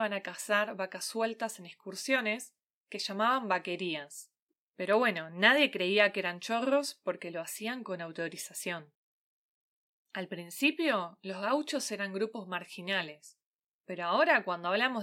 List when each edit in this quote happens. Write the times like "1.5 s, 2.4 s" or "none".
none